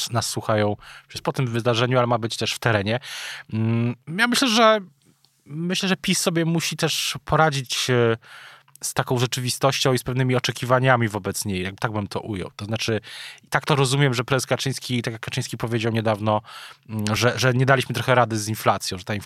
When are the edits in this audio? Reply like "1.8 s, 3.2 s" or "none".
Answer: none